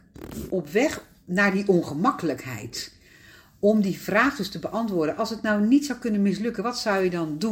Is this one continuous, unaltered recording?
yes; 0 cuts

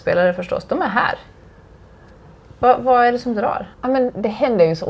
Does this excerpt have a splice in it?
yes; 1 cut; at 3.7 s

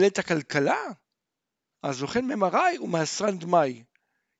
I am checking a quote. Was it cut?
yes; 1 cut; at 1.7 s

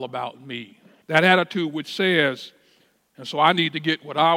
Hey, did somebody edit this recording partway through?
yes; 2 cuts; at 1.0 s, 3.0 s

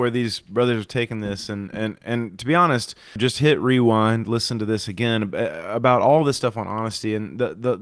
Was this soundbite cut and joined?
yes; 1 cut; at 3.2 s

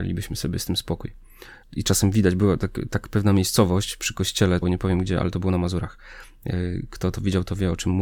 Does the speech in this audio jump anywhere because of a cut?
yes; 2 cuts; at 1.6 s, 4.6 s

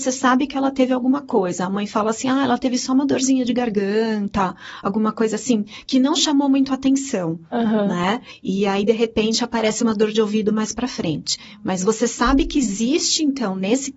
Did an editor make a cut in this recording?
no; 0 cuts

